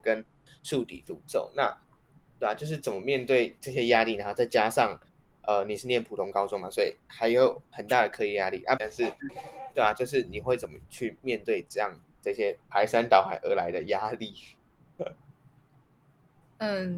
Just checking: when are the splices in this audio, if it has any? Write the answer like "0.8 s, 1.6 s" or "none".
8.8 s